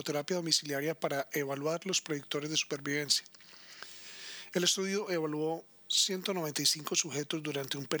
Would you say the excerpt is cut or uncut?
uncut